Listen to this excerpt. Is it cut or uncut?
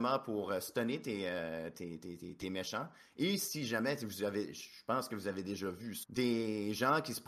cut